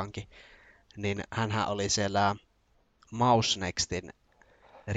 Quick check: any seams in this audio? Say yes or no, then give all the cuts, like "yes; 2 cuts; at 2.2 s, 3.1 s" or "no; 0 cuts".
no; 0 cuts